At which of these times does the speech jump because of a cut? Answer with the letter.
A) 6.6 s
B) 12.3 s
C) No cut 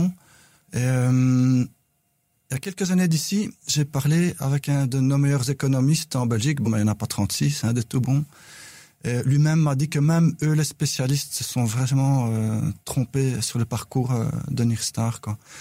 A